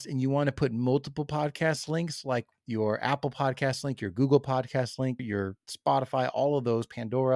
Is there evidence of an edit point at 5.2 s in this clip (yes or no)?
yes